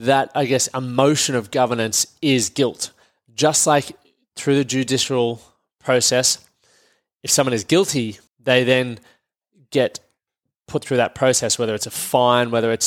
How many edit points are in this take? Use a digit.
1